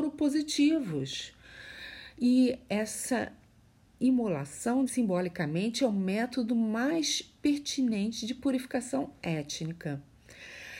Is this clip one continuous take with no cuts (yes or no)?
no